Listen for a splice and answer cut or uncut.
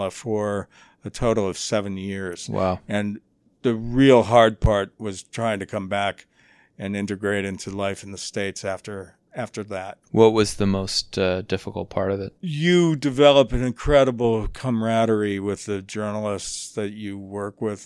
cut